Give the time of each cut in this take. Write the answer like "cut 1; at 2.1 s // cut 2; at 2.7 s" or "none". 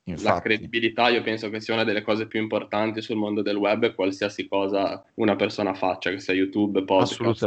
cut 1; at 5.1 s